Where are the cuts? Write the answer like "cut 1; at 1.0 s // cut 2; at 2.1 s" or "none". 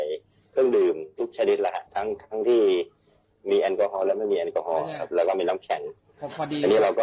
cut 1; at 1.9 s